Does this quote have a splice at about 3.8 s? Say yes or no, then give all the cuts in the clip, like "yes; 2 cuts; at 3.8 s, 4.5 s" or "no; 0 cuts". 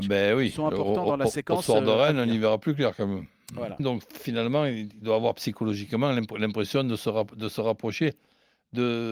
yes; 1 cut; at 3.8 s